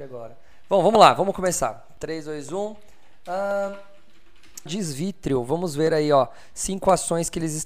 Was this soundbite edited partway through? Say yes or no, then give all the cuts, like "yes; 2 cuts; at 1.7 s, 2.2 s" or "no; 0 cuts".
yes; 1 cut; at 4.7 s